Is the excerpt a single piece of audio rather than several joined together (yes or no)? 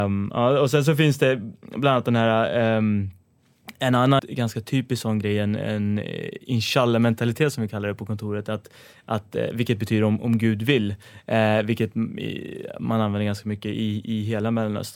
no